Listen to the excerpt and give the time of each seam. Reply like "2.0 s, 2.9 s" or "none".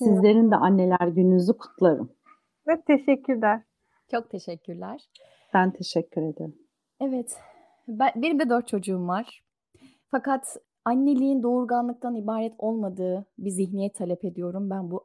none

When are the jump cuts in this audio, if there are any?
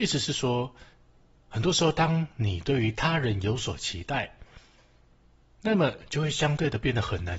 none

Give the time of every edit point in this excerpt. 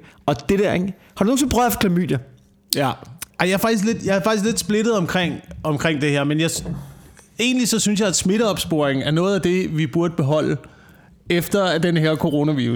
3.3 s

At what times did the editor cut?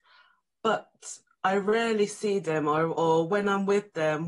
none

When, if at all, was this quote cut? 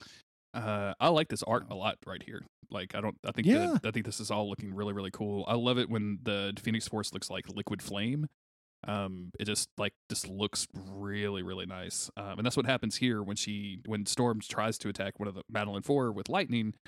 none

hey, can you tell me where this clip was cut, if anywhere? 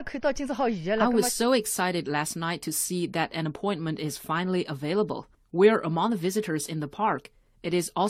none

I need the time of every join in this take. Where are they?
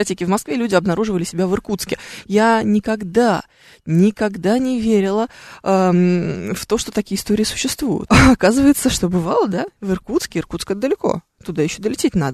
8.1 s

